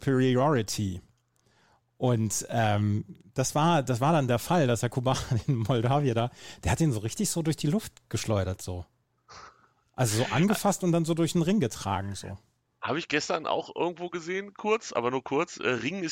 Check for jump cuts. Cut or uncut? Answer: uncut